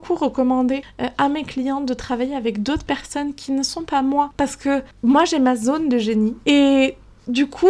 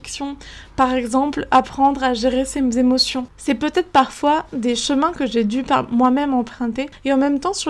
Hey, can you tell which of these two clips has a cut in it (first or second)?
first